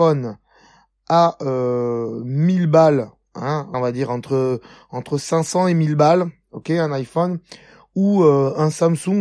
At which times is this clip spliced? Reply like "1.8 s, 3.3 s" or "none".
3.7 s

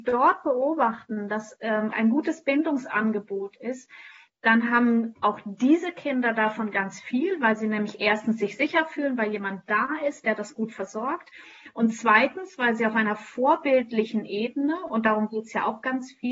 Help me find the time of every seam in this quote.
1.9 s

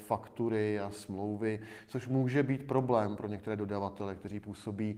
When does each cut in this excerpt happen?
none

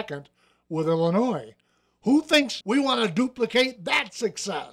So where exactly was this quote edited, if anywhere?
2.6 s

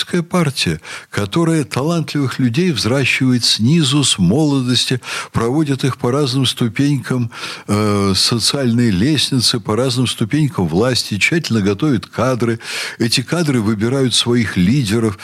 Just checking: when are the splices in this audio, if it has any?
none

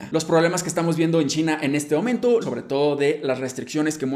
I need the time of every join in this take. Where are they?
2.4 s

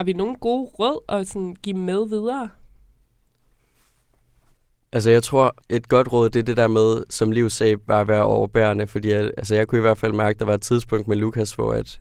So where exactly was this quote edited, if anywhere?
5.6 s

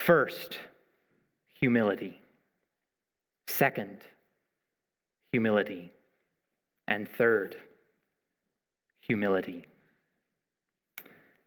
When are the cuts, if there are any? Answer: none

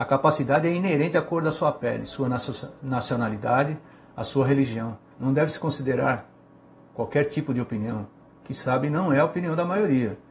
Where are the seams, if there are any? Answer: 5.1 s

